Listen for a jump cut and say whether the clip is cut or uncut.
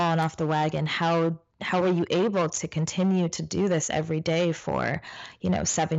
uncut